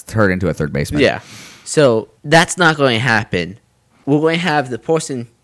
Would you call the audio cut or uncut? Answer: cut